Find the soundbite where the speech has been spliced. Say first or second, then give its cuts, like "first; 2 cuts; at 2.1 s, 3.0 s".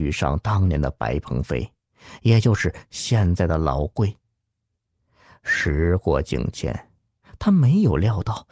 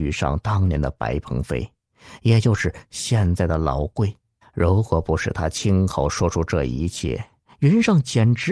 second; 1 cut; at 4.4 s